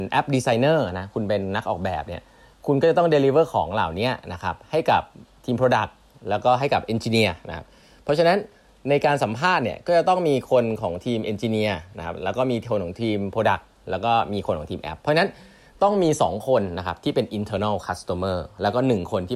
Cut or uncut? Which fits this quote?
uncut